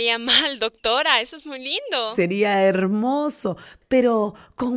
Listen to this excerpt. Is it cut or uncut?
cut